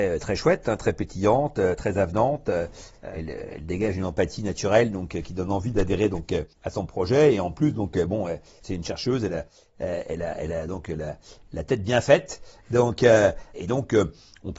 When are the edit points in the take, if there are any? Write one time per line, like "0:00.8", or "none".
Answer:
0:06.5